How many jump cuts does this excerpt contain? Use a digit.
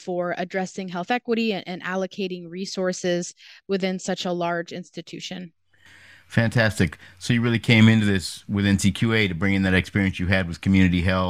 0